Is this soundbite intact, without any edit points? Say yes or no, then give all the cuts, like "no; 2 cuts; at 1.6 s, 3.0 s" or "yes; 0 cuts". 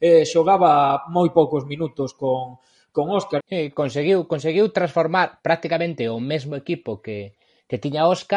no; 1 cut; at 3.4 s